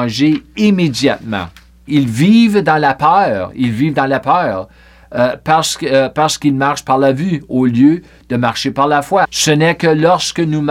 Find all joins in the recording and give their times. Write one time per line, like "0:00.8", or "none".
0:01.9
0:09.2